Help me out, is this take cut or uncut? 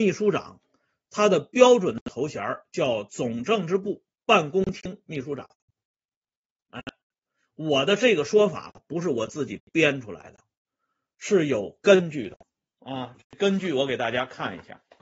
uncut